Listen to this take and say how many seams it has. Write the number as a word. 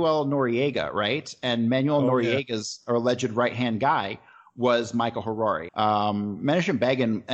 one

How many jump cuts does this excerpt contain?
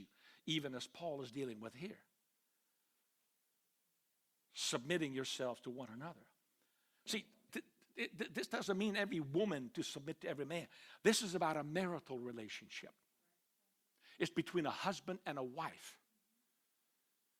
one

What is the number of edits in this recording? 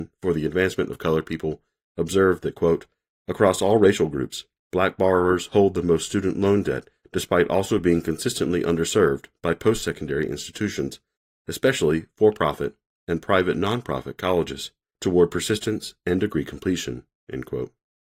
zero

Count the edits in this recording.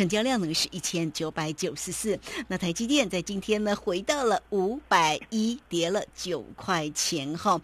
zero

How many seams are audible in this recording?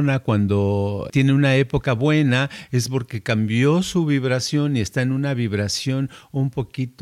one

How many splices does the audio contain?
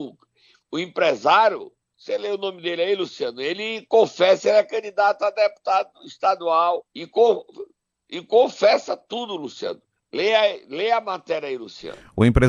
one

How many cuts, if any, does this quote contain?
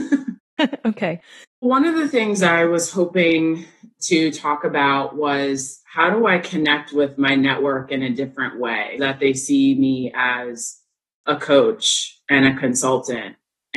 two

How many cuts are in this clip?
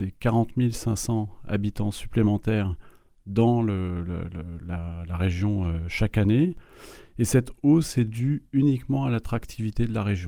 zero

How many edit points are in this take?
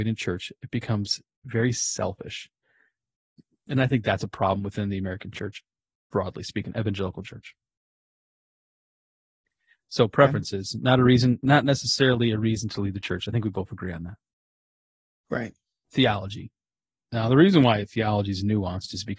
one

